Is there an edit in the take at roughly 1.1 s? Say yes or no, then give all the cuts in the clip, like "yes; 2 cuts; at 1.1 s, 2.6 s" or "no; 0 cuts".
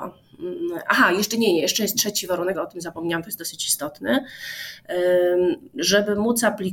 no; 1 cut; at 2.5 s